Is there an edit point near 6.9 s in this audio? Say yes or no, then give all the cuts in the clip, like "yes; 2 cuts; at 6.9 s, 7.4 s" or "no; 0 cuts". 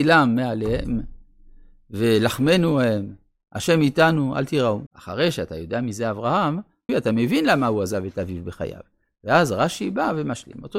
yes; 2 cuts; at 4.9 s, 6.9 s